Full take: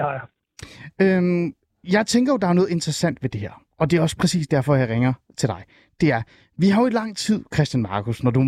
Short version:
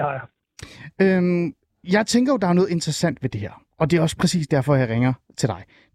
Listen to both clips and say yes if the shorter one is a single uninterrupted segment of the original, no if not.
yes